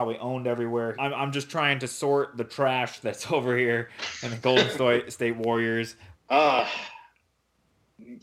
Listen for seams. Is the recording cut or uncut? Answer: cut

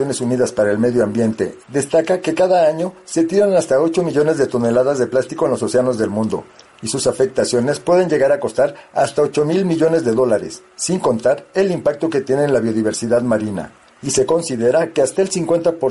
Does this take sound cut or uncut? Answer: cut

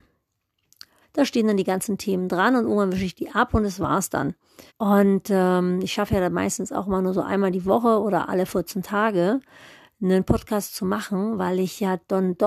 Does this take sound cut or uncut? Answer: cut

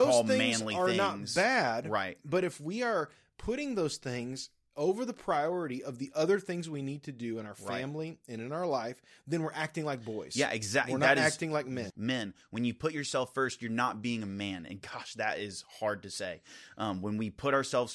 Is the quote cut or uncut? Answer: cut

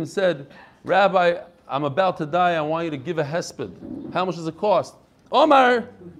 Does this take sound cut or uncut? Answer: cut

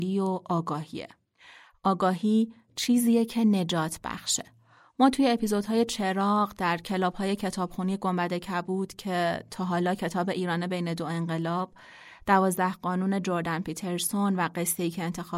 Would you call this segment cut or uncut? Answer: uncut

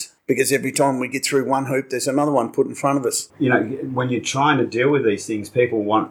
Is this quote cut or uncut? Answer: cut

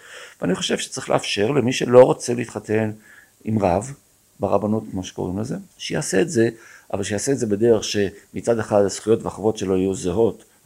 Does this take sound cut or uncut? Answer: cut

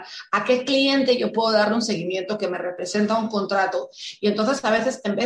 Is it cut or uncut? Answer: uncut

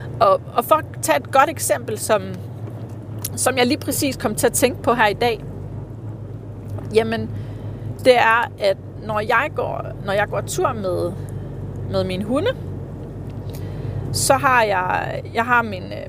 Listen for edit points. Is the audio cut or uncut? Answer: uncut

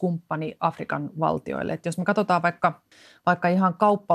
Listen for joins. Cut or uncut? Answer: uncut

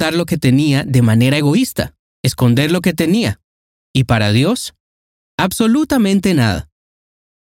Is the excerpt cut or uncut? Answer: cut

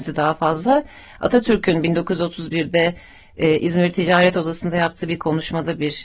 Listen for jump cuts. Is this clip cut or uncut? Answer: uncut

